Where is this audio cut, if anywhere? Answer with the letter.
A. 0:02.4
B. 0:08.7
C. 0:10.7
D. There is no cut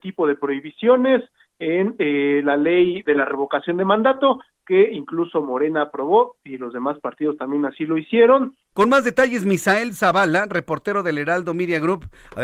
B